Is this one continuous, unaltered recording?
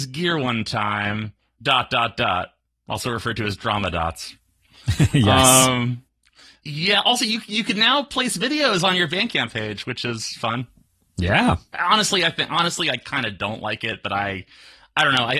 yes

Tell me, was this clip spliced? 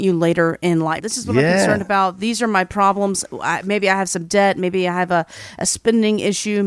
yes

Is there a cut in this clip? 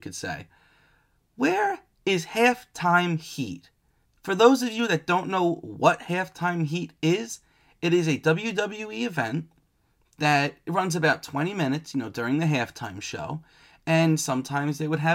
no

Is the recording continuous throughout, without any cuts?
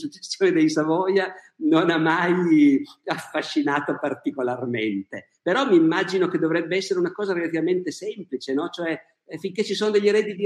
yes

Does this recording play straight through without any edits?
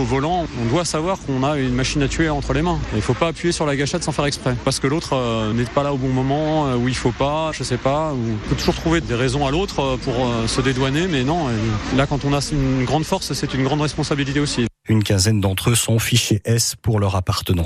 no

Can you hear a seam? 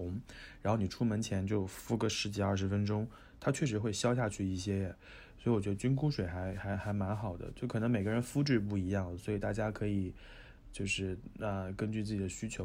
no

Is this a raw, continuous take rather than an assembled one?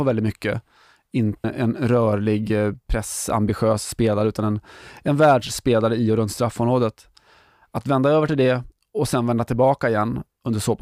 no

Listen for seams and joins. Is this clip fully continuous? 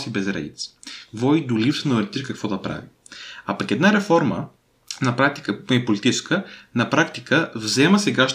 yes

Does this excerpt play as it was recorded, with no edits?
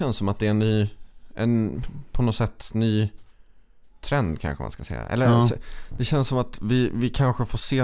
yes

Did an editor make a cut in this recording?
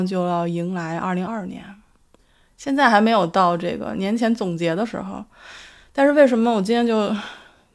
yes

